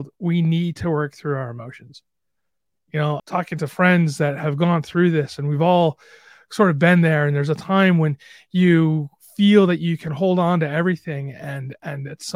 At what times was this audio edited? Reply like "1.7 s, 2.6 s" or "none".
3.2 s